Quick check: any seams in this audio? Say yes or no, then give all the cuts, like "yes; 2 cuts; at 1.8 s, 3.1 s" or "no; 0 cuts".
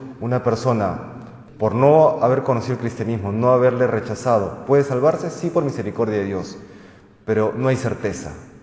no; 0 cuts